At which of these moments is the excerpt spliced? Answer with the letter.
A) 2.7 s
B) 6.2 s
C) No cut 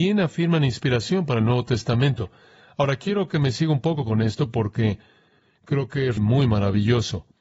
B